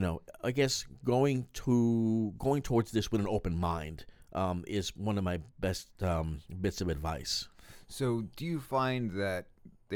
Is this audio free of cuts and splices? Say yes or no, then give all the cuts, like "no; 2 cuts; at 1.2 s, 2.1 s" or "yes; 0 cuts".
yes; 0 cuts